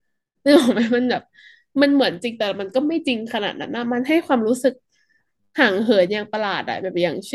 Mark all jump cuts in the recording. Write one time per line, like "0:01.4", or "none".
none

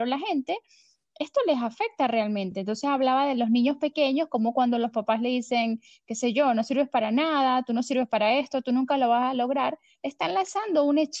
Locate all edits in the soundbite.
none

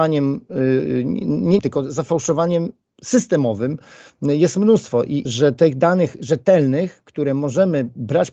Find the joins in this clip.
0:01.6
0:05.3

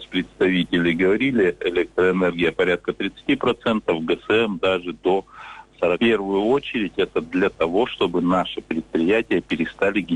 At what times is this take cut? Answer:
0:05.9

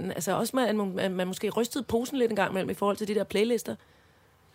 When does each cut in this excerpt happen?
none

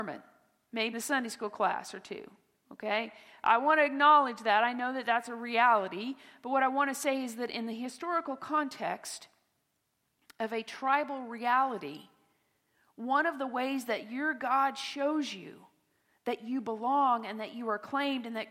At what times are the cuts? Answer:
0:00.9

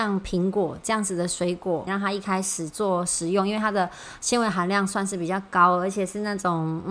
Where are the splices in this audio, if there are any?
0:01.9

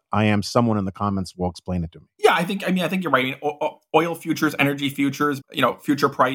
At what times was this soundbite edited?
0:05.4

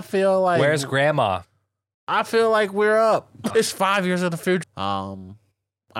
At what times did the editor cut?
0:03.5
0:04.6

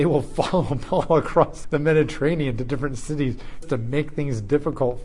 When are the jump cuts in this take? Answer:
0:01.6
0:03.6

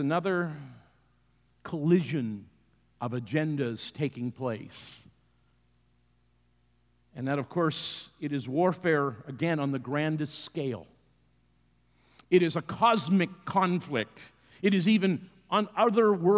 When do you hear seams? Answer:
none

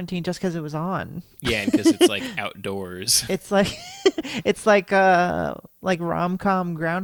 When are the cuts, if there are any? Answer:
none

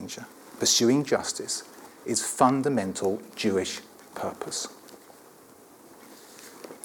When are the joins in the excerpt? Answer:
0:01.9

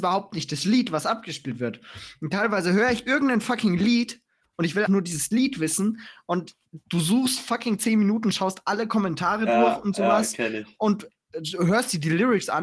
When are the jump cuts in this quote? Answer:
0:04.9

